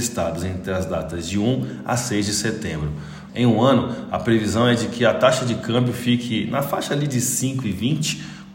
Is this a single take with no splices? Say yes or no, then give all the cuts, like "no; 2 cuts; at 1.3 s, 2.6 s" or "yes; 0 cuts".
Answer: no; 1 cut; at 3.3 s